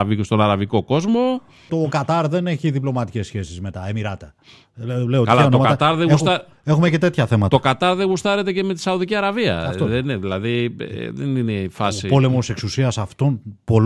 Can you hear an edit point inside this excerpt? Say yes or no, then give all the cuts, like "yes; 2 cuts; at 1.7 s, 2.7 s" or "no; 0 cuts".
yes; 1 cut; at 1.7 s